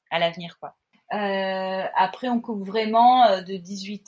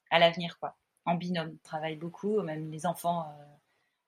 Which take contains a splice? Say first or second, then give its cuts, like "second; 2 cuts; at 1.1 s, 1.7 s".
first; 1 cut; at 0.9 s